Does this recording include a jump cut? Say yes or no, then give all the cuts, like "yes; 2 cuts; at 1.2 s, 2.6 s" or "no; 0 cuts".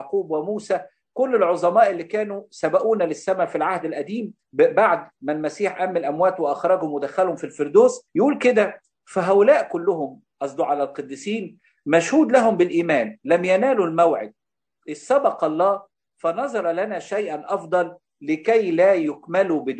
yes; 2 cuts; at 4.4 s, 8.1 s